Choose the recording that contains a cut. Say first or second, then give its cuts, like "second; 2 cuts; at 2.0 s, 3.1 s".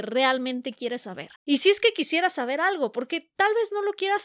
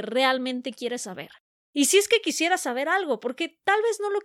first; 1 cut; at 1.4 s